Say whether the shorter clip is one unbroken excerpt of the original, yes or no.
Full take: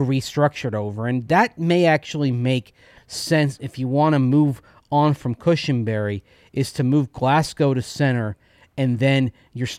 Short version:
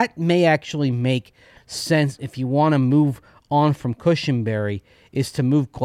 yes